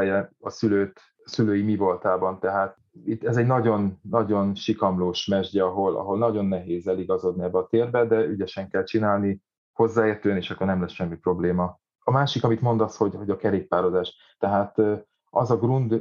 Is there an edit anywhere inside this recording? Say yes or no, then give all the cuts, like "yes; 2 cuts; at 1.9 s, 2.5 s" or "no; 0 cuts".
yes; 1 cut; at 14.4 s